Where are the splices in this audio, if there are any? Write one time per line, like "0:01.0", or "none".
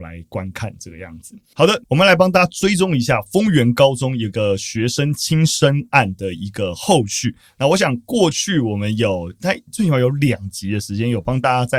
0:01.8